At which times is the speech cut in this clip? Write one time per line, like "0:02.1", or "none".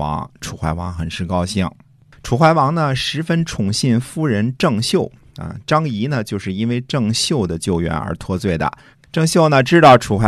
0:08.9